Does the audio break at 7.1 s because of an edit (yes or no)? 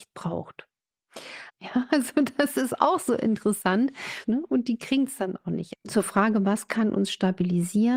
no